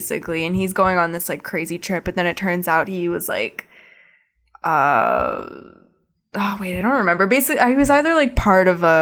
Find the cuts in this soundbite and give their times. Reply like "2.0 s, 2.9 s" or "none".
none